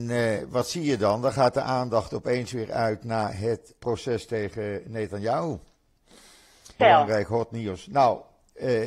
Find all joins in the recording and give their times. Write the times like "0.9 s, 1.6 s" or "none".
3.8 s, 6.8 s